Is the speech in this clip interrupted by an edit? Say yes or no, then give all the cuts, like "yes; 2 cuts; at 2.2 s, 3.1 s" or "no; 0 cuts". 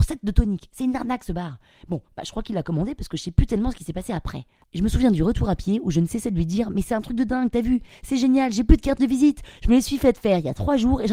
no; 0 cuts